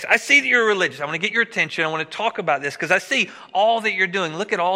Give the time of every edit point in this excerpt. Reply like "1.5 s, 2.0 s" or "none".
none